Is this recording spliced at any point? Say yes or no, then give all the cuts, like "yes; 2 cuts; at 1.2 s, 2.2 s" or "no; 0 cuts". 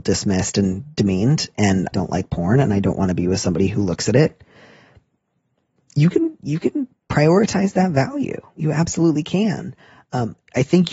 yes; 1 cut; at 1.9 s